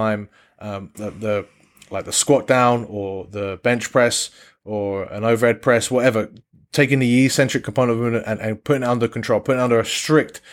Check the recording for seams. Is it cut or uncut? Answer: cut